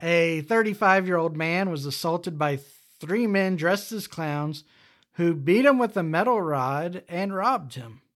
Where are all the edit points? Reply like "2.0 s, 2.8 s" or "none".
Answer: none